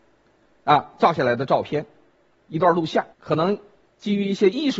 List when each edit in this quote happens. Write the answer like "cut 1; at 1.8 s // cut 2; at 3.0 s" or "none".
cut 1; at 3.1 s